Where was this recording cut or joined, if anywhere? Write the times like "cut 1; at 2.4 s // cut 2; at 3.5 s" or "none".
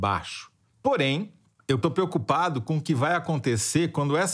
none

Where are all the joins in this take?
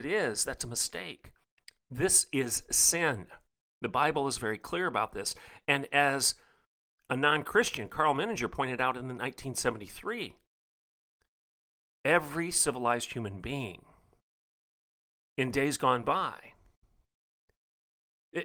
none

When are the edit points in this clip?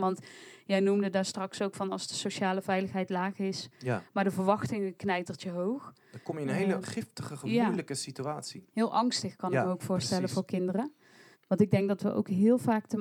cut 1; at 6.8 s // cut 2; at 11.3 s

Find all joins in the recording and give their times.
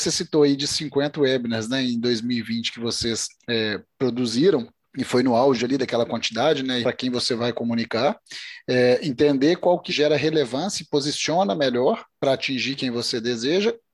cut 1; at 6.8 s // cut 2; at 9.9 s

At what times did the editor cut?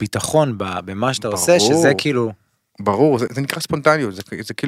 cut 1; at 3.3 s

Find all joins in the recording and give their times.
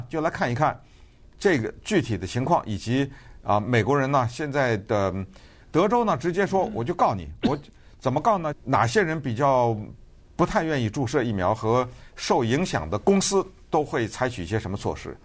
cut 1; at 5.6 s // cut 2; at 8.5 s

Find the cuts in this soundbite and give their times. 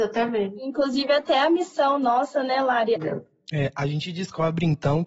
cut 1; at 2.9 s

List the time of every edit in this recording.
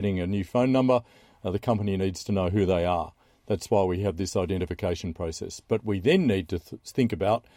none

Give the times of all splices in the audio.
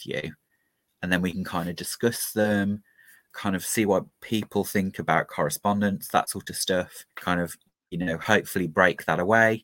cut 1; at 3.3 s // cut 2; at 7.1 s

